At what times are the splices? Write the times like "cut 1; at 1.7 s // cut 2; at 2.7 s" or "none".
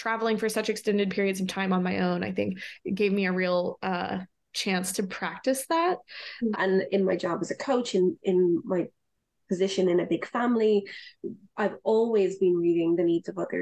cut 1; at 6.5 s